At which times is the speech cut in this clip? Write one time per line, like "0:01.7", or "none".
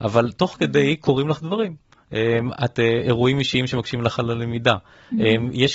none